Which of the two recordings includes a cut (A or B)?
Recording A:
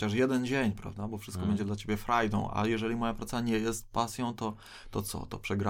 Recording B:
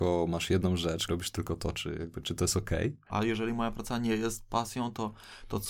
B